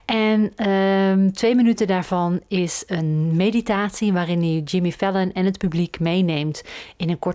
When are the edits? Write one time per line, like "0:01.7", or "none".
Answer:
none